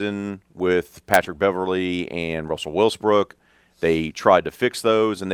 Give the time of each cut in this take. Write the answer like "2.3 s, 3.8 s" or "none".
none